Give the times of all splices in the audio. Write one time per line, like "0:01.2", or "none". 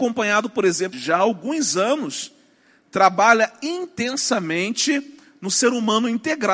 0:00.9